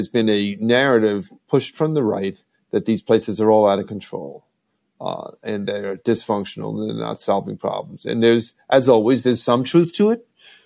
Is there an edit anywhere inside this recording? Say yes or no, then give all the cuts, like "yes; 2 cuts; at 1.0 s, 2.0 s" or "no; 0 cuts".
no; 0 cuts